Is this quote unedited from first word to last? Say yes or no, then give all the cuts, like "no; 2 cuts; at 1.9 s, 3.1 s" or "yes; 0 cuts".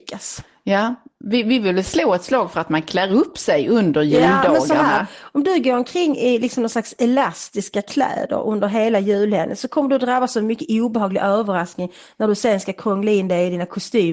yes; 0 cuts